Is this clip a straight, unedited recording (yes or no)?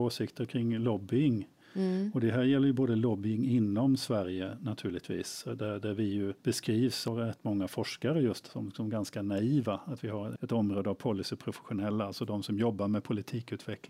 yes